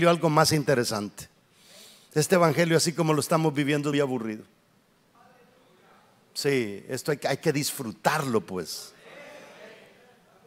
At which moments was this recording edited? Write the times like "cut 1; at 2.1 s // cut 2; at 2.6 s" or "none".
cut 1; at 3.9 s